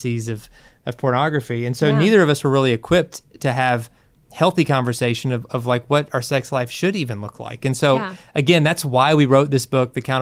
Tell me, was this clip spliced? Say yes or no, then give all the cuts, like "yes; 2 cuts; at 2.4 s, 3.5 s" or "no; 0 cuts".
no; 0 cuts